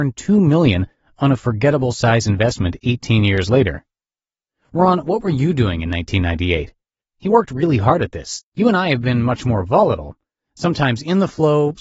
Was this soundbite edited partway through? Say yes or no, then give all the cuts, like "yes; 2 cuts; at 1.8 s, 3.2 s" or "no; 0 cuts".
yes; 2 cuts; at 7.0 s, 8.5 s